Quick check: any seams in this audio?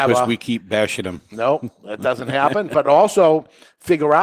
no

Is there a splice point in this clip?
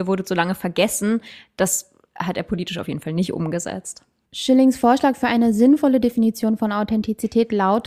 yes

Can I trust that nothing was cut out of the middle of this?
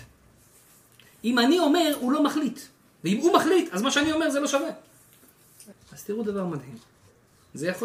no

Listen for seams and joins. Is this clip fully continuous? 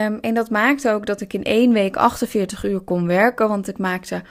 yes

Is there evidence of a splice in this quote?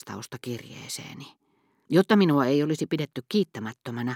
yes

